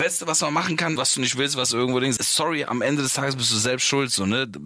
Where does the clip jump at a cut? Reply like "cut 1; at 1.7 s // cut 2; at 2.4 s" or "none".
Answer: cut 1; at 1.0 s // cut 2; at 2.2 s